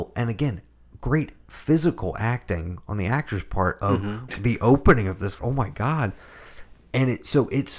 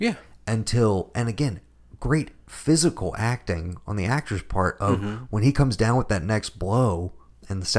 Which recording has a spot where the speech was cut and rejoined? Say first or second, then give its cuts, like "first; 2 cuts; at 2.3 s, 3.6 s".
first; 2 cuts; at 4.3 s, 5.4 s